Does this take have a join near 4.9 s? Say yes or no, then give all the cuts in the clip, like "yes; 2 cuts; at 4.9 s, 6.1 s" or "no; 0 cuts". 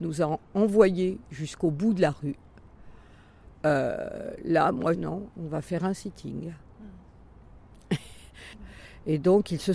yes; 1 cut; at 4.9 s